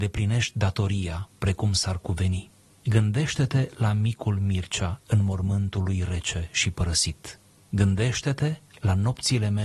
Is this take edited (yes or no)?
no